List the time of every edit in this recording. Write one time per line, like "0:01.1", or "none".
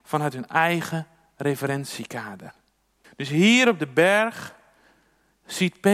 0:03.0